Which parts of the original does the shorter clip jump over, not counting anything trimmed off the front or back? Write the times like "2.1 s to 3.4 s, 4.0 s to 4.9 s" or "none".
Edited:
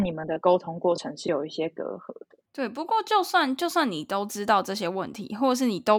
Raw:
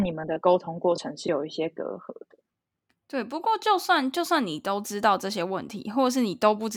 2.4 s to 3.0 s